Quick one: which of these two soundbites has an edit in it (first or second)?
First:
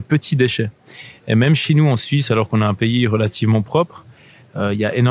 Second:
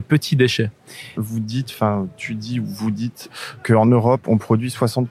second